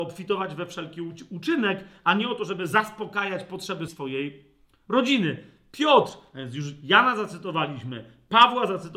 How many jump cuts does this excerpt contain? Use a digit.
1